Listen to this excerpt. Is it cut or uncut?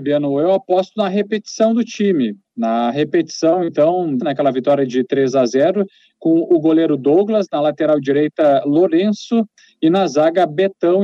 cut